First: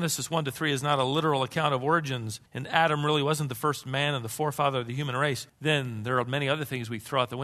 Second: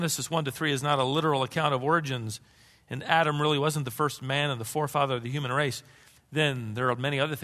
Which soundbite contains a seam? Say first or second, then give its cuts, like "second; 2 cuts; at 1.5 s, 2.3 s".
first; 2 cuts; at 2.5 s, 5.5 s